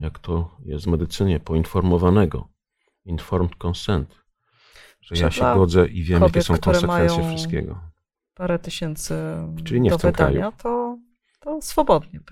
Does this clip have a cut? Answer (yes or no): no